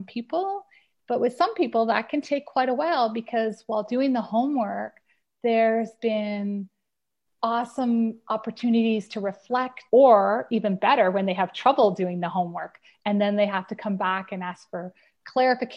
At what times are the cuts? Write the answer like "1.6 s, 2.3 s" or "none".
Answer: 9.9 s